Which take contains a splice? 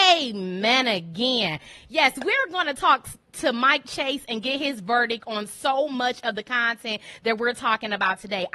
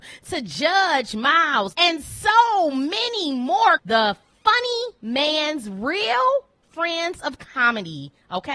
second; 2 cuts; at 1.7 s, 3.8 s

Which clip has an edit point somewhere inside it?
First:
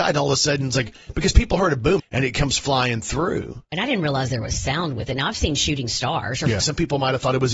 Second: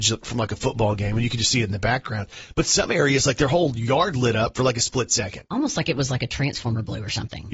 first; 2 cuts; at 2.0 s, 6.6 s

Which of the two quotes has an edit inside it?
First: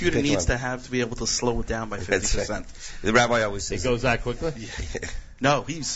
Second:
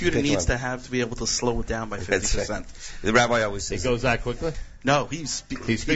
second; 1 cut; at 4.5 s

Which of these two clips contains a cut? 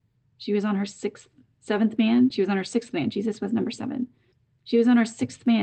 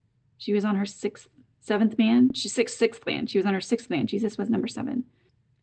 first; 1 cut; at 2.3 s

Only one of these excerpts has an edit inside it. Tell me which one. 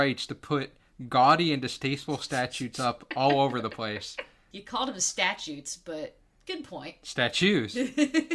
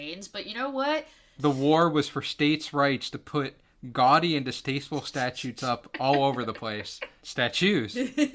second; 2 cuts; at 1.4 s, 7.2 s

